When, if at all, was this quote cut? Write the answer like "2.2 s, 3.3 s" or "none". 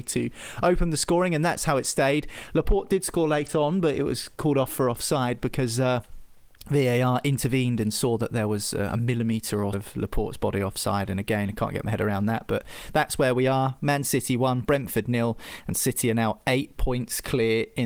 9.7 s